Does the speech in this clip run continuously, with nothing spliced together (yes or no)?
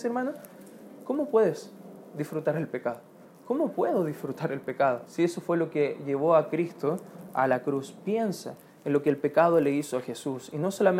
no